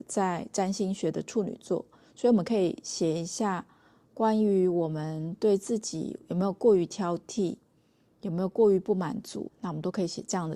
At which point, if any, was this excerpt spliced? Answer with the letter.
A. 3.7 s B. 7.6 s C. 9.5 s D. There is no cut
C